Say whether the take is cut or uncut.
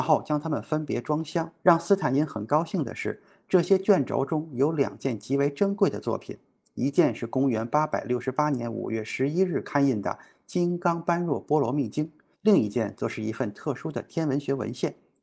cut